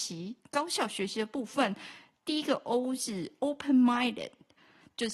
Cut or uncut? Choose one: uncut